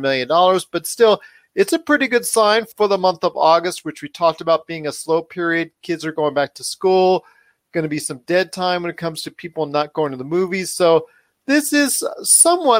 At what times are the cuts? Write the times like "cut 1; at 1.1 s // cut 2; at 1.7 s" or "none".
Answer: none